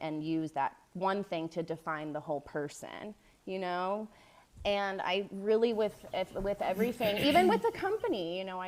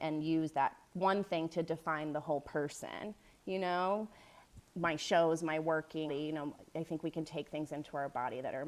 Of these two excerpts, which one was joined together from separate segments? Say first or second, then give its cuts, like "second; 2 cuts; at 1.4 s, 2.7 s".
second; 2 cuts; at 4.6 s, 6.1 s